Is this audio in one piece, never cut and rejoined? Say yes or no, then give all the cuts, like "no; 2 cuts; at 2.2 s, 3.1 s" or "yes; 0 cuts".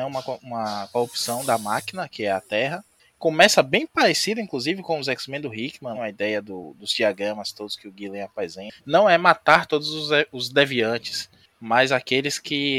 no; 2 cuts; at 5.9 s, 8.8 s